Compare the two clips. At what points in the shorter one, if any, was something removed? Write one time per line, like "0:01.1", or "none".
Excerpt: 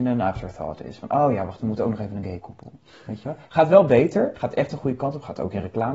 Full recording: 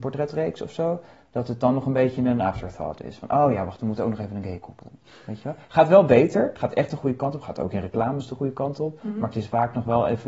none

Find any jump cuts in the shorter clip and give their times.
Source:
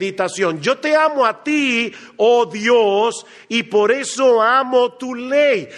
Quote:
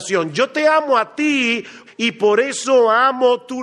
0:01.9

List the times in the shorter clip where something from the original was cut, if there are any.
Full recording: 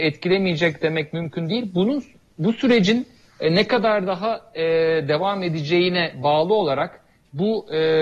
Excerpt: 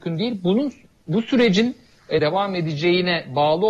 0:02.2

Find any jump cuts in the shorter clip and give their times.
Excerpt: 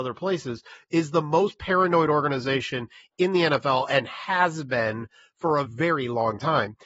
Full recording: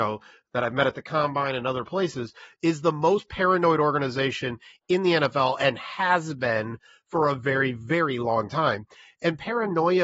0:05.6

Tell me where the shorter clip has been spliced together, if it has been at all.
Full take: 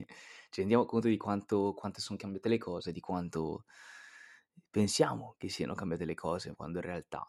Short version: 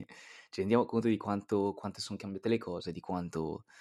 none

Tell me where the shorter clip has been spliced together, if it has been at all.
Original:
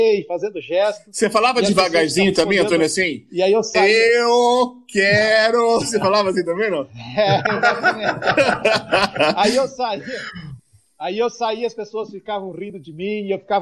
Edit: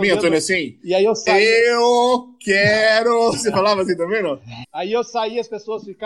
0:04.6

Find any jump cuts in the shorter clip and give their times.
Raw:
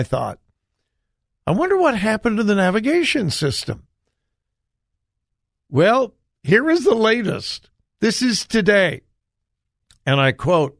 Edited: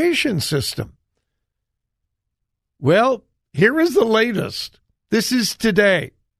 none

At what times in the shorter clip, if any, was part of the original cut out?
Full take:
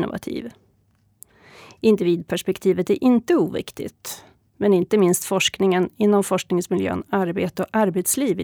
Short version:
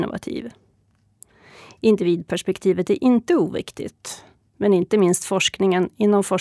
none

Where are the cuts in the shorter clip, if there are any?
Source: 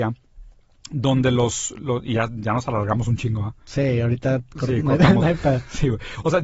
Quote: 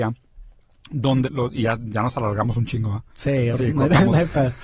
0:01.2
0:03.5

